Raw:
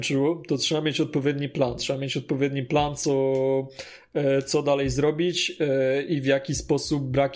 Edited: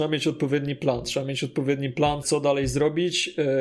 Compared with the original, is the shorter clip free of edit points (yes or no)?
no